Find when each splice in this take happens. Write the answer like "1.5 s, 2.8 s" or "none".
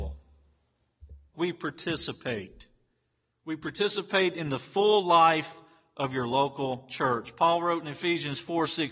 1.3 s